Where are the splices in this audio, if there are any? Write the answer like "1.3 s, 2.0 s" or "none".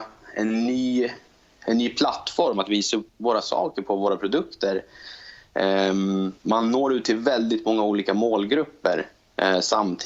3.1 s, 6.4 s